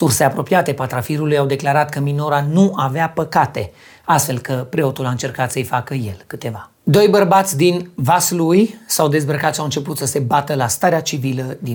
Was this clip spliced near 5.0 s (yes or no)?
no